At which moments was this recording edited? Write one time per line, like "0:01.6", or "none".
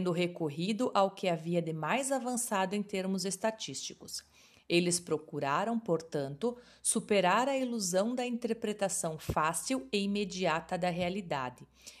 none